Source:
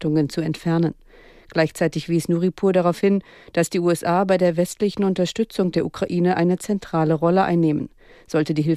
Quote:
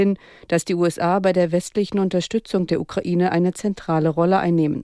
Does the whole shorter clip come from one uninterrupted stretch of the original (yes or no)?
yes